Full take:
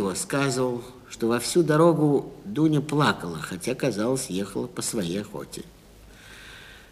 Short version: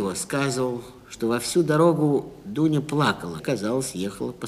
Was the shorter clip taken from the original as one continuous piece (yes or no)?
no